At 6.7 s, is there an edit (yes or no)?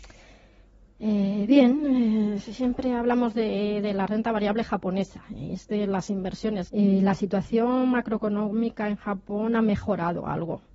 yes